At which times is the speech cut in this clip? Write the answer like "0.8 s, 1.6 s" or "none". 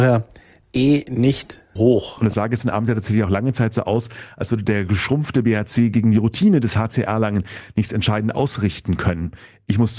1.8 s